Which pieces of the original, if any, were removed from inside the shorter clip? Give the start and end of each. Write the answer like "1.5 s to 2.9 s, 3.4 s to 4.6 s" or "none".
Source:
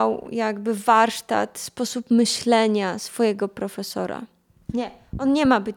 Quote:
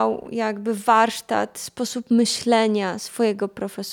none